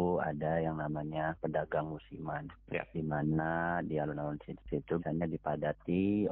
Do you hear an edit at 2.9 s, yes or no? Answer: no